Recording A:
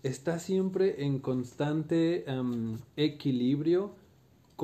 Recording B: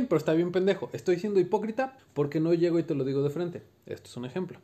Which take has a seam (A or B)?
B